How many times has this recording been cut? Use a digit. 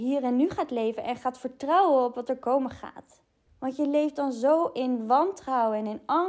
1